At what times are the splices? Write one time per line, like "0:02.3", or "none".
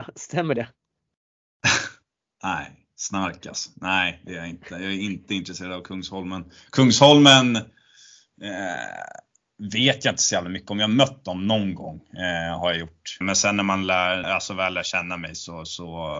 0:13.2
0:14.2